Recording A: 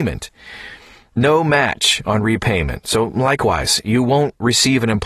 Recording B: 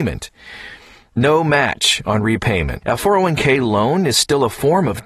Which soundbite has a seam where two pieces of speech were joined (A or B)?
B